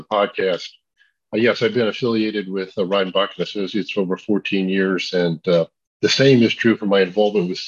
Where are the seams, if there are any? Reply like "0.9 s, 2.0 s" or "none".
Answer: none